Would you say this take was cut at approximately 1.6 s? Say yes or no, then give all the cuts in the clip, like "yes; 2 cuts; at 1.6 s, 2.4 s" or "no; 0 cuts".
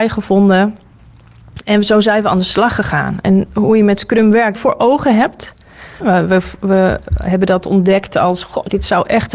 no; 3 cuts; at 3.5 s, 4.5 s, 6.0 s